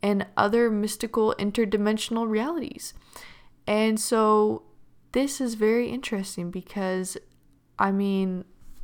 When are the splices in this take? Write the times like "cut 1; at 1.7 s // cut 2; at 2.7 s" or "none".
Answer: none